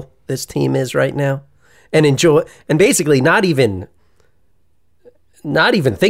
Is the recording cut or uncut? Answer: uncut